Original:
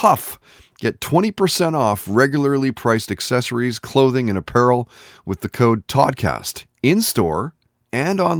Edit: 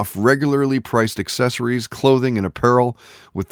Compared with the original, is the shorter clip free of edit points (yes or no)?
yes